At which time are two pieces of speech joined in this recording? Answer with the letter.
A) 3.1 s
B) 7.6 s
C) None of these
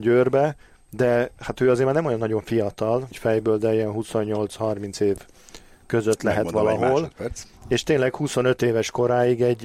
A